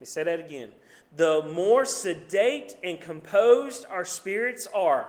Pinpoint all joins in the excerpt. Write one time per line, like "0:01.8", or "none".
none